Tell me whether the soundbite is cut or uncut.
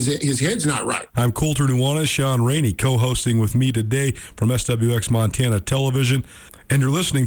cut